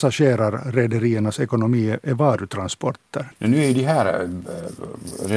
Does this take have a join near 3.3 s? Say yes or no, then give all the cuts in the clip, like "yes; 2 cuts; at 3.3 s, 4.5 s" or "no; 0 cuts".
yes; 1 cut; at 3.3 s